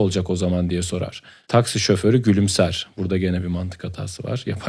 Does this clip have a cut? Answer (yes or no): no